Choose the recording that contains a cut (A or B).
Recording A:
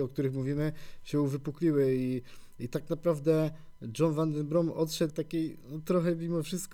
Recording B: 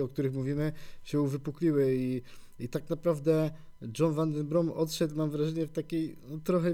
A